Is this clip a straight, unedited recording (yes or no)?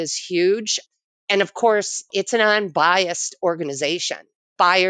yes